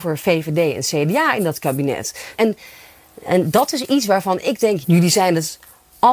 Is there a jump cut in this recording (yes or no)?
yes